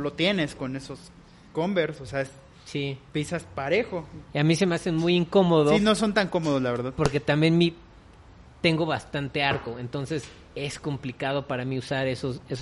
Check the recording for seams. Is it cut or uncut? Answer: uncut